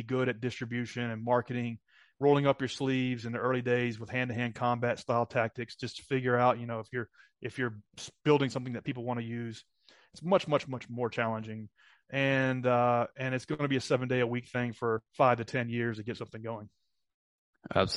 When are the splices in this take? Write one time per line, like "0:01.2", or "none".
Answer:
0:10.6
0:15.1